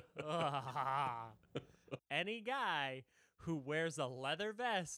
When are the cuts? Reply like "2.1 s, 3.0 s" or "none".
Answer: 2.0 s